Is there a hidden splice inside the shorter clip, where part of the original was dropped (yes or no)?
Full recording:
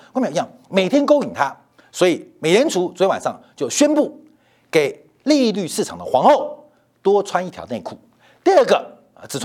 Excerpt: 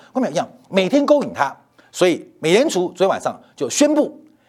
no